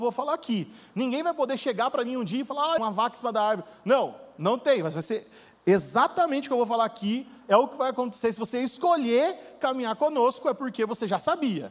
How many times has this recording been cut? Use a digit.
1